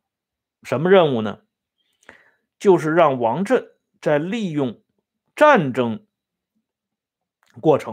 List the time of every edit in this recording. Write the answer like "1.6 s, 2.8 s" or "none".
none